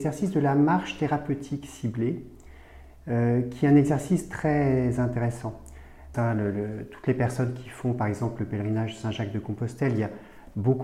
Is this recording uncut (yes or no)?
no